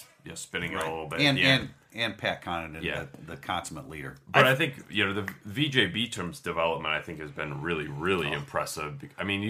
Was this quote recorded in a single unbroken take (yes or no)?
yes